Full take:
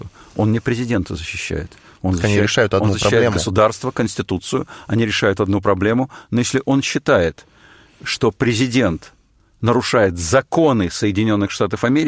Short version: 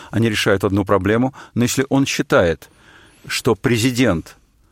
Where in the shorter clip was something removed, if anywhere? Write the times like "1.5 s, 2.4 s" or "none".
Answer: none